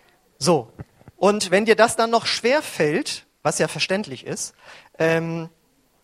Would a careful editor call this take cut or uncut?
uncut